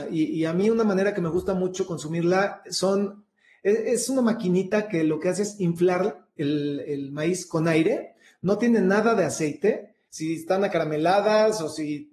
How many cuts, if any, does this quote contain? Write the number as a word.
one